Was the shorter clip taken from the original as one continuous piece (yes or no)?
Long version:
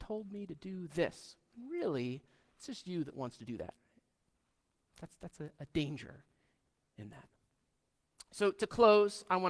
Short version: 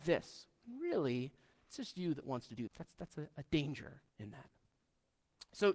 no